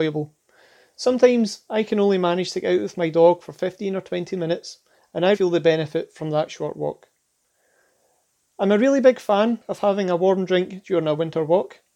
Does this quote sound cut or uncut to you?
cut